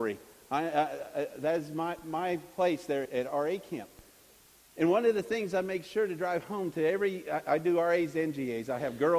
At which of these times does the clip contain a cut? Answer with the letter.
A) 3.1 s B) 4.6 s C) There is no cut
A